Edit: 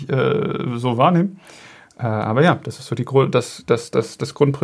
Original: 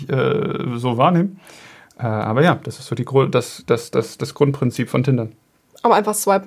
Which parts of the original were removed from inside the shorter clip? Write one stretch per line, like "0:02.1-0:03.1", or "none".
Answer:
none